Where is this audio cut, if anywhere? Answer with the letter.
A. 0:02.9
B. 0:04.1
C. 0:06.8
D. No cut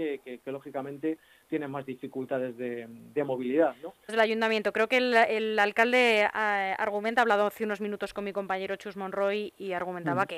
B